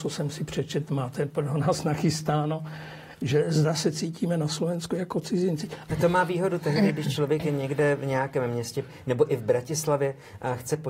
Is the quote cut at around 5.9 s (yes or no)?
yes